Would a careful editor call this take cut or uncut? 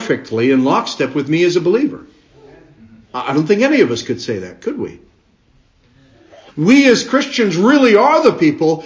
cut